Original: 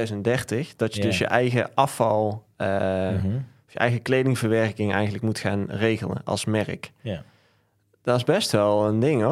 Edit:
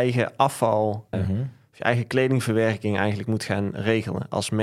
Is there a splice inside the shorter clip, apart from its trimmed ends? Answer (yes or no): yes